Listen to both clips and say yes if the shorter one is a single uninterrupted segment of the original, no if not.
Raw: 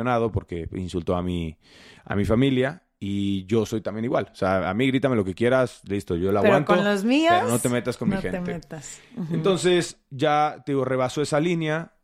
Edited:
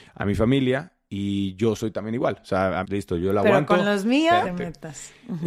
no